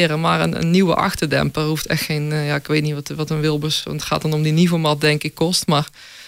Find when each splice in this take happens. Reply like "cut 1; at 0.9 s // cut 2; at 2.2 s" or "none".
none

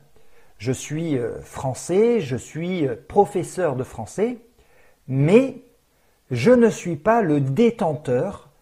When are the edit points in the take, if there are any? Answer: none

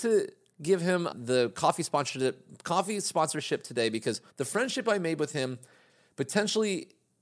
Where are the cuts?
cut 1; at 1.1 s // cut 2; at 4.3 s

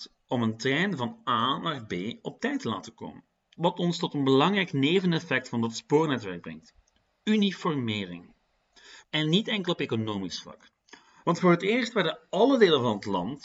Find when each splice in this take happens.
cut 1; at 3.6 s // cut 2; at 9.0 s // cut 3; at 11.2 s

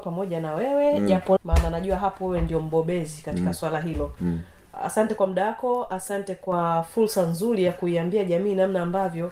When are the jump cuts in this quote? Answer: cut 1; at 1.4 s

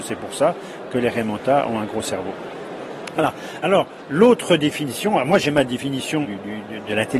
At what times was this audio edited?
cut 1; at 6.2 s

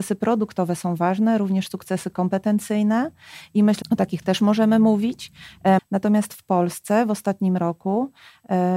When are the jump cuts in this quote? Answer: cut 1; at 3.8 s // cut 2; at 5.8 s

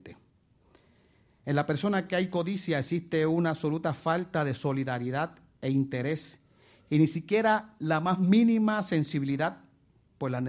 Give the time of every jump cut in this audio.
none

